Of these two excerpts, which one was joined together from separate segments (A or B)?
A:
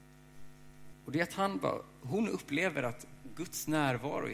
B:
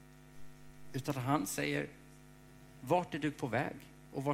A